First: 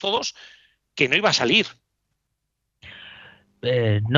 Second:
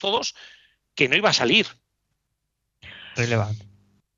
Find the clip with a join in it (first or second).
second